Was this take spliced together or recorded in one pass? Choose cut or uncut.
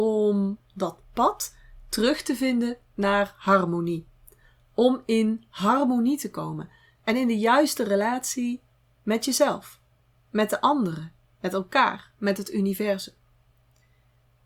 uncut